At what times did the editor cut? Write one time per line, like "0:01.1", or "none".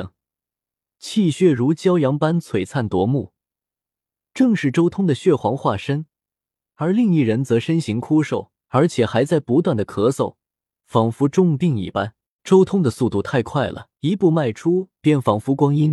0:08.7
0:12.4
0:13.9